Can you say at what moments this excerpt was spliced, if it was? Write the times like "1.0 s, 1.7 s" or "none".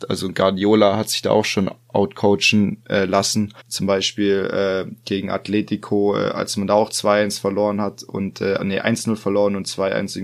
3.6 s, 8.6 s